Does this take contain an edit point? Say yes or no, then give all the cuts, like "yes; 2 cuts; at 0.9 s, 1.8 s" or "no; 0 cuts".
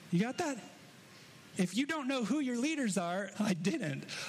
yes; 2 cuts; at 1.5 s, 3.3 s